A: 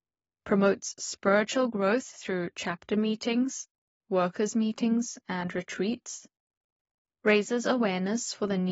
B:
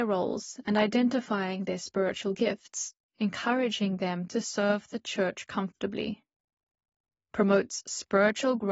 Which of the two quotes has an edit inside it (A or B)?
B